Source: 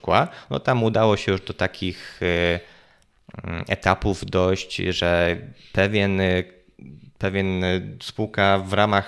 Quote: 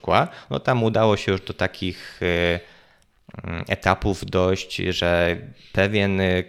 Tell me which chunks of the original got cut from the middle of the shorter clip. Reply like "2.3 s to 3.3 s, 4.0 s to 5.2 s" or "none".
none